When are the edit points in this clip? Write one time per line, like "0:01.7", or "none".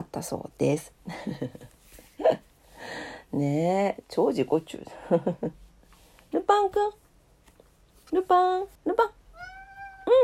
0:08.8

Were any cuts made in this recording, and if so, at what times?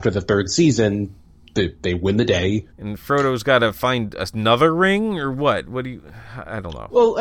0:02.7

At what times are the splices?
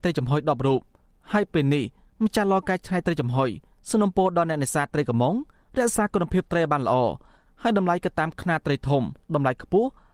none

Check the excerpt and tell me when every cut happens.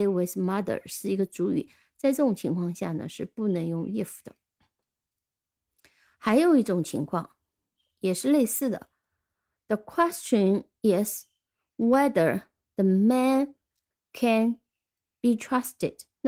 none

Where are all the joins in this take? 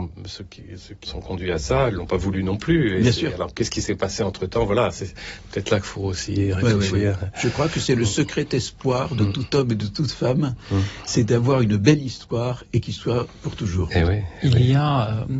0:01.1

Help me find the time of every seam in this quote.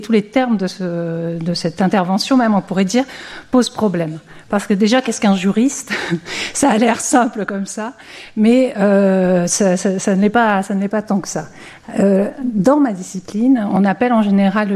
none

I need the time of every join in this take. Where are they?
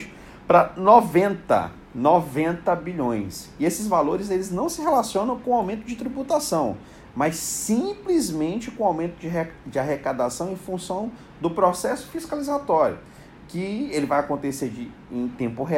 none

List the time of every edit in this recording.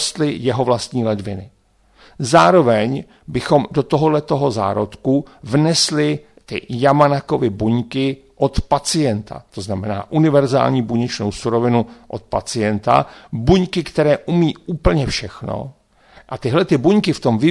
none

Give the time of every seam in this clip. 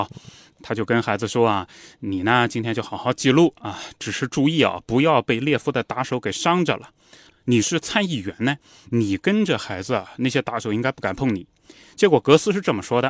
0:07.3

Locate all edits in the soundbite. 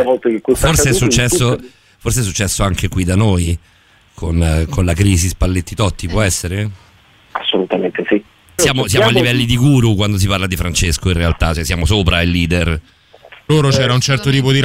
0:08.6
0:13.5

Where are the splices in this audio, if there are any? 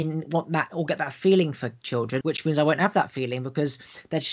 0:02.2

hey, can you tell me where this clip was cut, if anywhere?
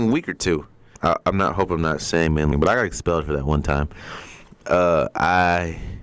0:01.0
0:02.5

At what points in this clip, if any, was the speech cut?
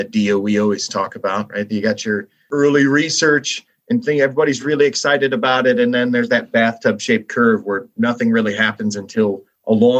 none

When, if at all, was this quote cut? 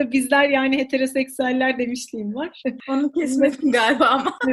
none

